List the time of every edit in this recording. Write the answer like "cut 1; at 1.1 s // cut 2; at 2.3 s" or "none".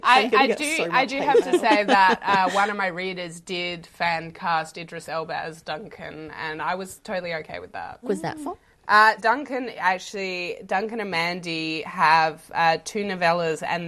cut 1; at 8.0 s // cut 2; at 9.2 s